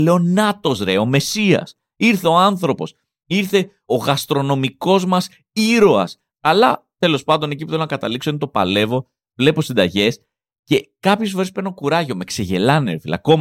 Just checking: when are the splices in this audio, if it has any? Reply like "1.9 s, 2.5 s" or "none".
6.3 s